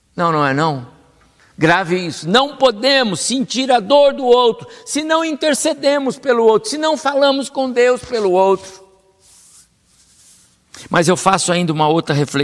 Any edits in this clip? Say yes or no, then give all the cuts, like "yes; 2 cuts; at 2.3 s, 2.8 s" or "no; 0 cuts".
yes; 1 cut; at 1.4 s